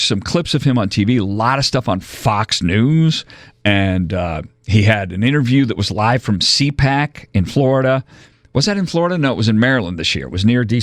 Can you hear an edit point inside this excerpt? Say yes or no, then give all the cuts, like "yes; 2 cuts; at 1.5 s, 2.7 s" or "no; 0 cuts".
no; 0 cuts